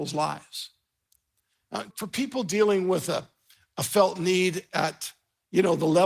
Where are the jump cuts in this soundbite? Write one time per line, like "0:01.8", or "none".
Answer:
0:01.9